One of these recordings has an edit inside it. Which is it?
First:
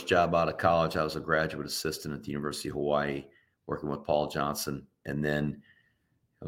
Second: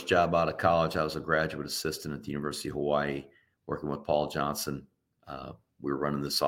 first; 1 cut; at 5.0 s

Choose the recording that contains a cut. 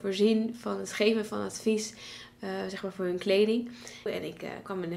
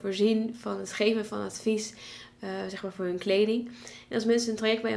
first; 1 cut; at 4.1 s

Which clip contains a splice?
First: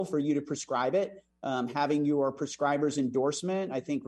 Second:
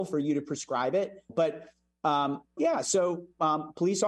second; 2 cuts; at 1.3 s, 2.6 s

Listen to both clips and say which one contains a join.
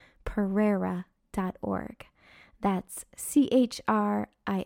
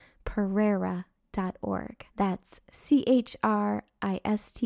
second; 1 cut; at 2.1 s

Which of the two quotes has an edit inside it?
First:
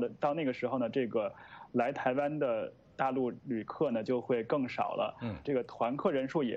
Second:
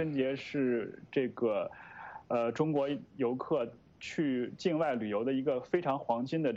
first; 1 cut; at 5.5 s

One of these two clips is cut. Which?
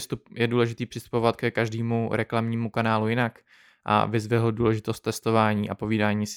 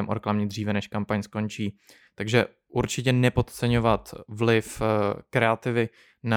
second; 1 cut; at 2.1 s

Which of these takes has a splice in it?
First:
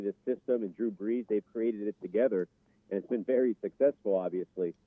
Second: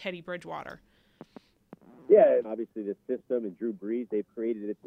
second; 1 cut; at 2.4 s

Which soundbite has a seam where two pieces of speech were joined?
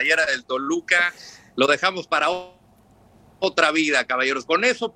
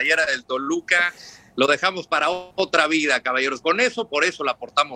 second; 1 cut; at 2.5 s

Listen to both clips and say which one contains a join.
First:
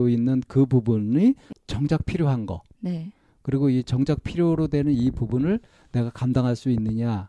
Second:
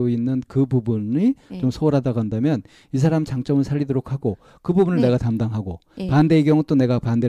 first; 1 cut; at 1.5 s

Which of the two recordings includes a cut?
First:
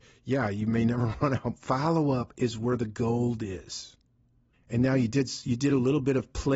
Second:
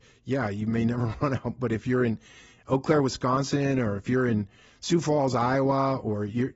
first; 2 cuts; at 1.5 s, 4.5 s

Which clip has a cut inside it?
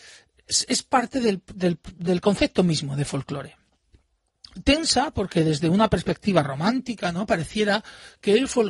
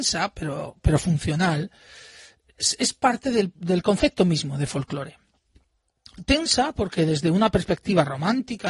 second; 1 cut; at 3.6 s

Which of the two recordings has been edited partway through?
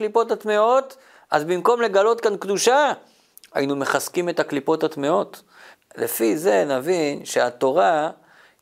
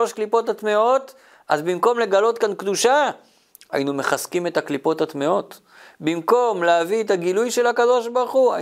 first; 1 cut; at 5.7 s

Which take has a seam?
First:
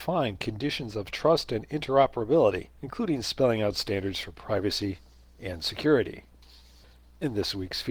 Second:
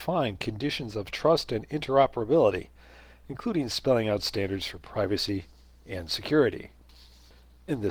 first; 1 cut; at 2.7 s

